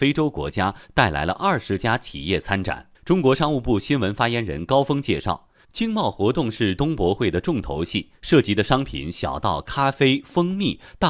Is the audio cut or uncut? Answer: cut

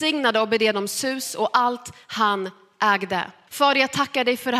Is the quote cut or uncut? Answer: cut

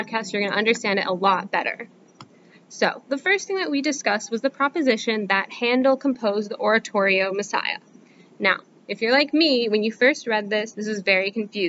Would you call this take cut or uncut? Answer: uncut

